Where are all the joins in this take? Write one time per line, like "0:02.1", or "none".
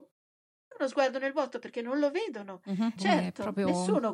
0:03.0